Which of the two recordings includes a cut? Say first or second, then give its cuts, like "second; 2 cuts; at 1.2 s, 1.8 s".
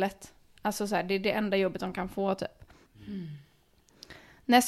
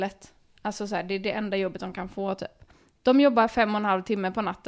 first; 1 cut; at 2.9 s